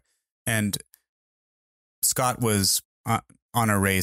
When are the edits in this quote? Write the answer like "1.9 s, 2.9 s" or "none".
2.8 s